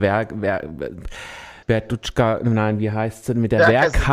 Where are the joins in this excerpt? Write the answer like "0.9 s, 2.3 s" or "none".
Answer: 1.6 s